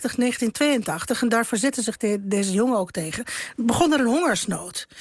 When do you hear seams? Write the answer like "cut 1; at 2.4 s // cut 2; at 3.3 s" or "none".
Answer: none

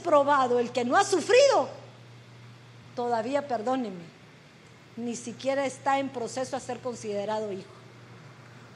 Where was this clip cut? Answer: none

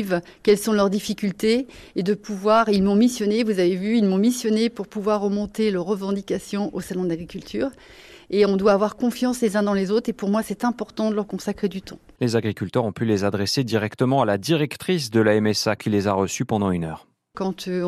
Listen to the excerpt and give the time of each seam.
cut 1; at 12.2 s // cut 2; at 15.8 s

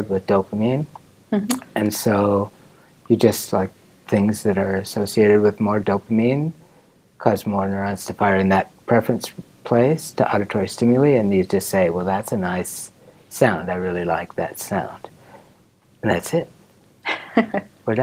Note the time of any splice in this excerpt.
none

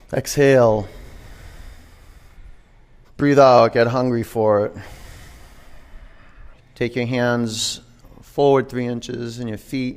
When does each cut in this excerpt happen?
cut 1; at 3.0 s // cut 2; at 6.6 s

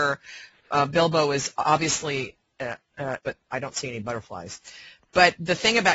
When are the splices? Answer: cut 1; at 3.2 s

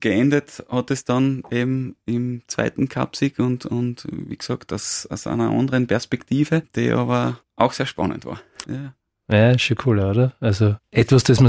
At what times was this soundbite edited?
cut 1; at 8.6 s

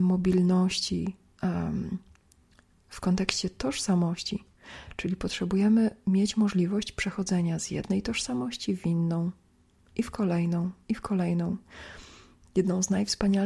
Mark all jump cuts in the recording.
cut 1; at 12.4 s

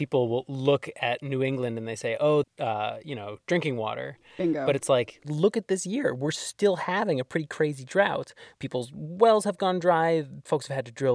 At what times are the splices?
cut 1; at 2.4 s

